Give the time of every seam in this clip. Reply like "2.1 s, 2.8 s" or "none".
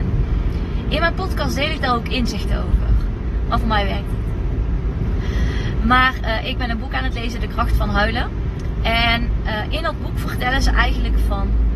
3.5 s